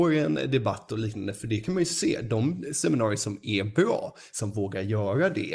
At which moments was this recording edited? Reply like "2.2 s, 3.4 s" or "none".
4.3 s